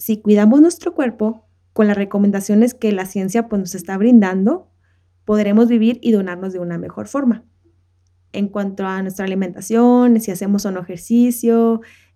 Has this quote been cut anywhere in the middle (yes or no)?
yes